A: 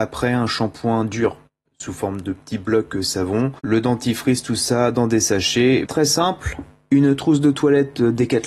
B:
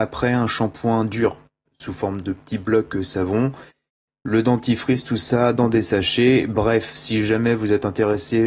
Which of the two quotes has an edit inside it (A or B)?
A